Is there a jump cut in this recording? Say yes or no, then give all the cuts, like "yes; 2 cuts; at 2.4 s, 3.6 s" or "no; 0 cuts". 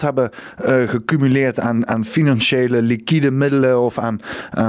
no; 0 cuts